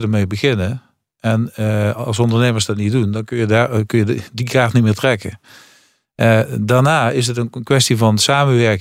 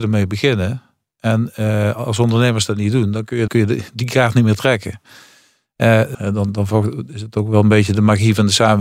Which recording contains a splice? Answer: second; 2 cuts; at 3.5 s, 6.1 s

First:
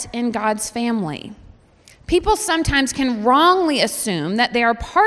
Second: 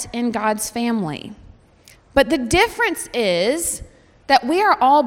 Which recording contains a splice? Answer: second; 1 cut; at 1.9 s

